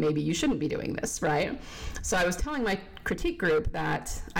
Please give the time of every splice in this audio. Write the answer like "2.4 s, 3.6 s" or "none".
none